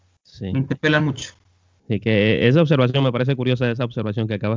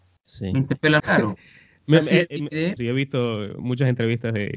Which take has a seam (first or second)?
second